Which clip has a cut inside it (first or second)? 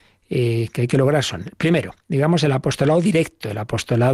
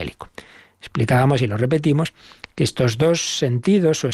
first